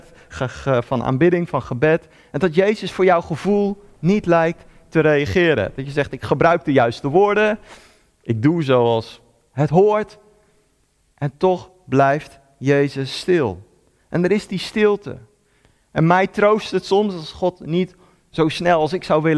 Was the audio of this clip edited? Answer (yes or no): no